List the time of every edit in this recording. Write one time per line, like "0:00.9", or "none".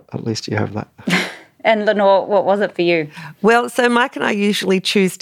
none